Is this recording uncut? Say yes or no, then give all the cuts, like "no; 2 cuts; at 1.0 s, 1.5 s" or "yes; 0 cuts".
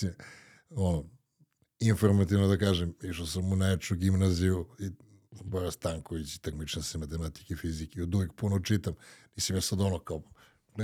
yes; 0 cuts